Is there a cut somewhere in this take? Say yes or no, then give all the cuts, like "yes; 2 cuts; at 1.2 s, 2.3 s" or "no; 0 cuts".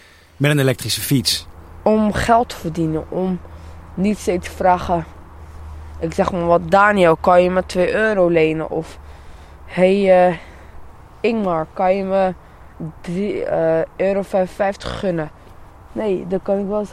no; 0 cuts